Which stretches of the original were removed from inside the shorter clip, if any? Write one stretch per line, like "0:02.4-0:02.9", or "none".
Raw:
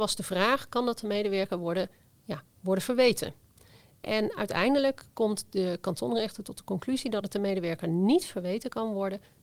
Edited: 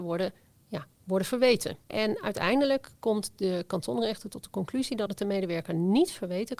0:03.4-0:04.0